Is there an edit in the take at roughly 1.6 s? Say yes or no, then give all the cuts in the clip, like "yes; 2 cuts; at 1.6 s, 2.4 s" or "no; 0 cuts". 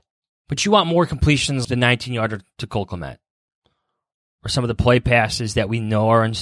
yes; 1 cut; at 1.6 s